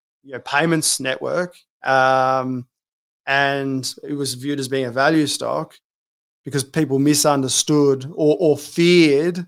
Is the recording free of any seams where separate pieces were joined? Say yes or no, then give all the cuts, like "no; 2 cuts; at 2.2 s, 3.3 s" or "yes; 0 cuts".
yes; 0 cuts